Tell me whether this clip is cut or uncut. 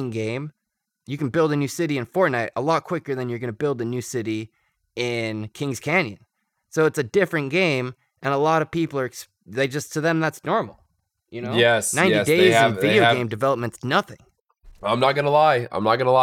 uncut